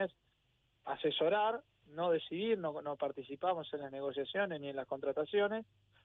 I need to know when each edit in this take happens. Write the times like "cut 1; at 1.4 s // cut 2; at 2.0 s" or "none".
none